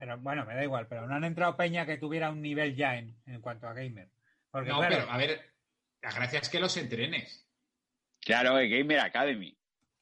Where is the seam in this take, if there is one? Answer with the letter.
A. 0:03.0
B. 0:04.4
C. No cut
C